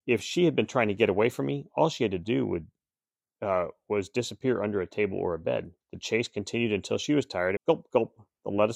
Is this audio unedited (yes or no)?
no